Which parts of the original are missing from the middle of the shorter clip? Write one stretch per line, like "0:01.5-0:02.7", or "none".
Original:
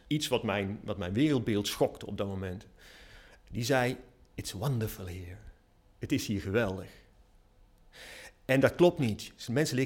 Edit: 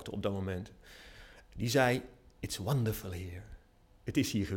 none

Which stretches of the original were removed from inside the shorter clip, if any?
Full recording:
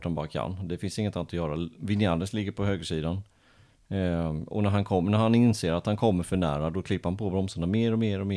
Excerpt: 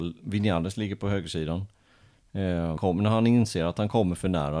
0:04.3-0:04.9

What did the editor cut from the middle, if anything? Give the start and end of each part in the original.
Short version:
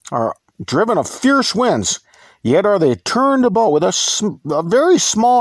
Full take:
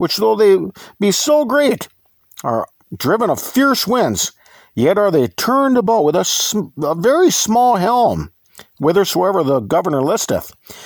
none

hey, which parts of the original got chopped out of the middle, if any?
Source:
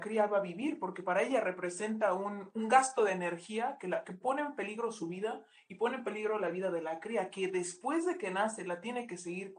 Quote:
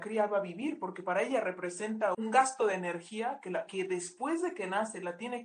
0:02.1-0:02.5
0:04.0-0:07.3

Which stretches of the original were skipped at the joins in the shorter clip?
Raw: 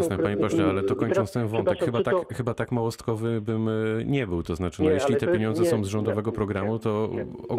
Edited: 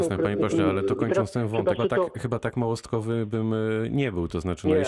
0:01.8-0:01.9

